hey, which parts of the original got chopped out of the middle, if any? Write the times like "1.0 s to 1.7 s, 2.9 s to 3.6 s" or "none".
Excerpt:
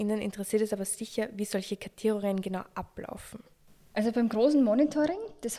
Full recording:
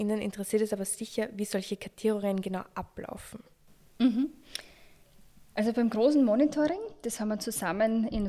3.9 s to 5.5 s

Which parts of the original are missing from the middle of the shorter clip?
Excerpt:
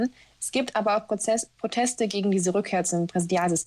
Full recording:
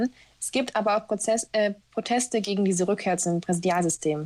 1.5 s to 1.8 s

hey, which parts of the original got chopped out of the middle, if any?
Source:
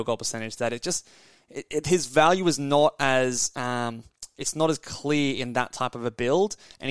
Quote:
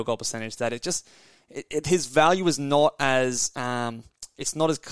none

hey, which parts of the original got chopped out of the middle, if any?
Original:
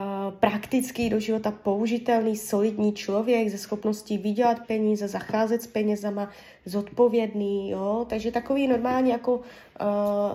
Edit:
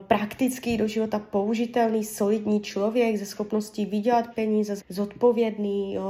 5.1 s to 6.5 s

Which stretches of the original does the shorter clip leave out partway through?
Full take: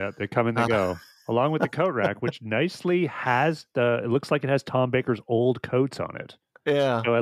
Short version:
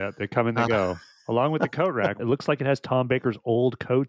2.2 s to 4.0 s

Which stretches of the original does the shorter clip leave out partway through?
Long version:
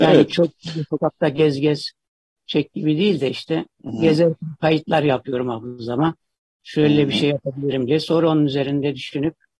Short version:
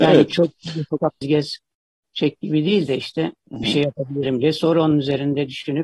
1.2 s to 1.5 s, 4.0 s to 7.1 s

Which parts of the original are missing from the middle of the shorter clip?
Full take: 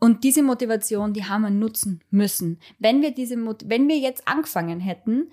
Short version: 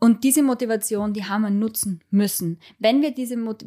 none

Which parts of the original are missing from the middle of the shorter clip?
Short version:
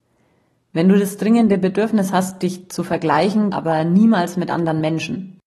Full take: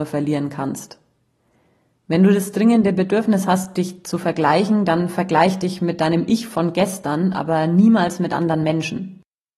4.9 s to 7.3 s

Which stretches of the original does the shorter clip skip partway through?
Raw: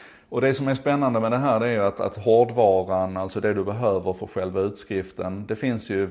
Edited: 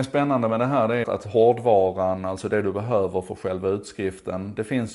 1.7 s to 1.9 s

